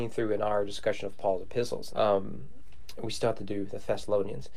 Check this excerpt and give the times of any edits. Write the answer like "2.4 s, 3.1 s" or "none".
1.9 s